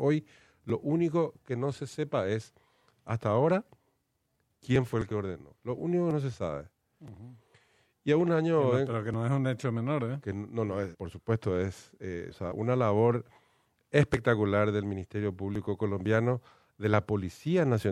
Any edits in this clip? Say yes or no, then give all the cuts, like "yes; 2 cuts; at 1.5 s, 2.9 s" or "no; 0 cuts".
yes; 2 cuts; at 10.9 s, 12.3 s